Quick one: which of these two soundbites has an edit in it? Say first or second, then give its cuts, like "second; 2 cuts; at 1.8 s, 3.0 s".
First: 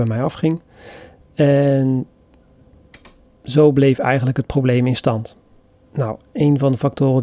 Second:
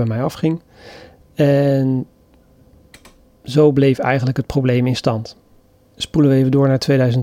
first; 1 cut; at 5.8 s